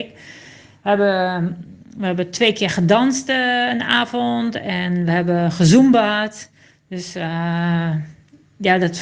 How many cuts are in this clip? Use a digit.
0